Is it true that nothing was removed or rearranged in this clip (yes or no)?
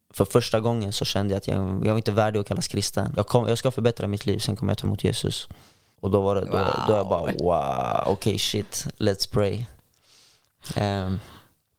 no